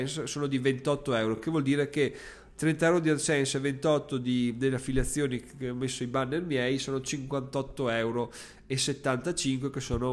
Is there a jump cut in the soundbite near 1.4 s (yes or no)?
no